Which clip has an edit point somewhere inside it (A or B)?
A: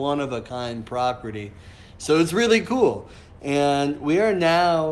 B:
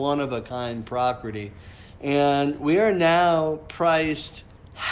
B